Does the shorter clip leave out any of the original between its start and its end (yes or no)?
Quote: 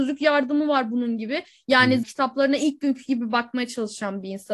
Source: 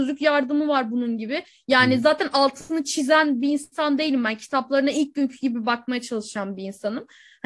yes